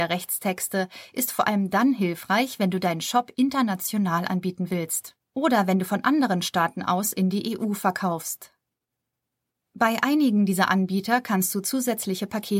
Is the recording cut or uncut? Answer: uncut